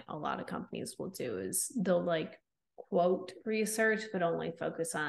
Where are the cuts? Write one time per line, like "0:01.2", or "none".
none